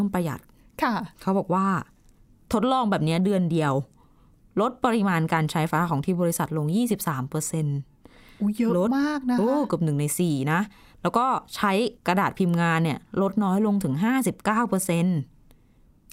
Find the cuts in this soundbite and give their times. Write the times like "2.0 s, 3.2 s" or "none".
5.7 s, 12.0 s

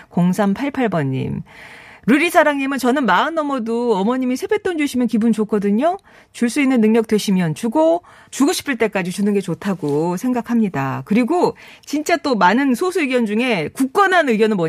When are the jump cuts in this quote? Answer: 8.2 s

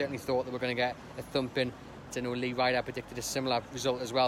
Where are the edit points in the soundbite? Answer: 2.1 s

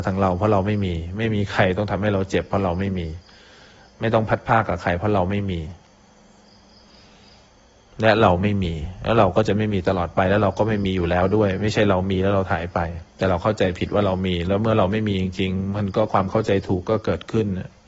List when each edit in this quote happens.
13.1 s

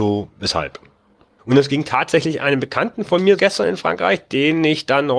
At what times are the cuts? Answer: 1.4 s, 3.4 s

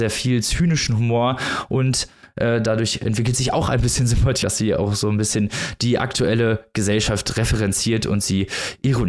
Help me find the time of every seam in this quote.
4.4 s

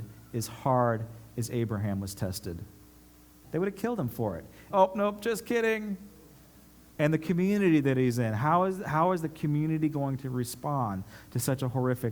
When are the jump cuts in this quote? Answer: 3.4 s, 4.7 s, 7.0 s

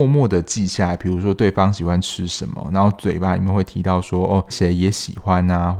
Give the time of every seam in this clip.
4.5 s

